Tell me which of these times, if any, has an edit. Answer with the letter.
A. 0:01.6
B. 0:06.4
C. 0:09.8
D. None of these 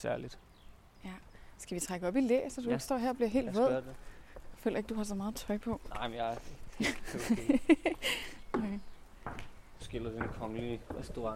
C